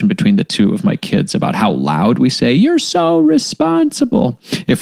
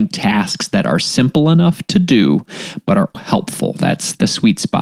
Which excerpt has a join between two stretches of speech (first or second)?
second